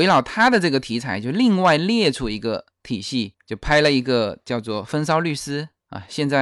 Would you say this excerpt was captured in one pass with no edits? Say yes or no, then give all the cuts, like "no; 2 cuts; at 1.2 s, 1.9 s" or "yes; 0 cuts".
yes; 0 cuts